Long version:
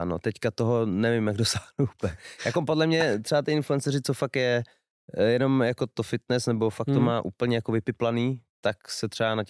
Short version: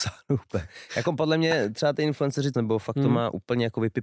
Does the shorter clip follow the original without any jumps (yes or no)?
no